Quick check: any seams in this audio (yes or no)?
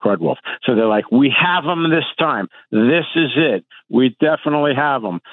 no